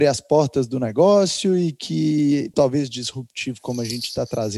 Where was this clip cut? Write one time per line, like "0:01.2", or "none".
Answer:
0:02.5